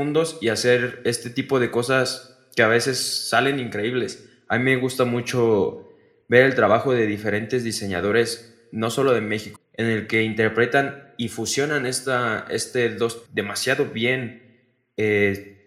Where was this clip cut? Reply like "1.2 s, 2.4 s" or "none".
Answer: 9.6 s, 13.3 s